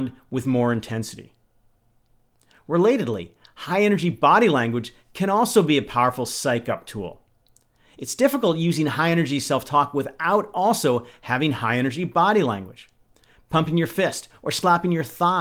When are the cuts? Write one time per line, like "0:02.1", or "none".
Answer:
none